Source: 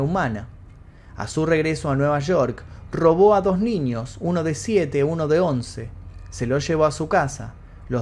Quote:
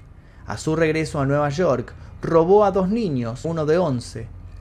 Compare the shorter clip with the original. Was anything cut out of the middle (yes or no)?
yes